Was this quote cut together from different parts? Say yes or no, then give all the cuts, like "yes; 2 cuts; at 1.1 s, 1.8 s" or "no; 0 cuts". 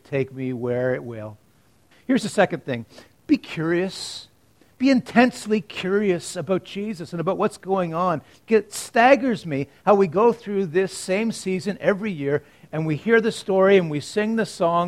yes; 1 cut; at 1.9 s